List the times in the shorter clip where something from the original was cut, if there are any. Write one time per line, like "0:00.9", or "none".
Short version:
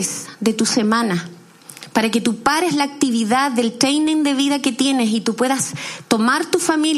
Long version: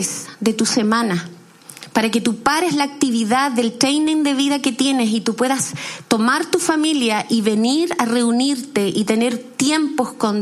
none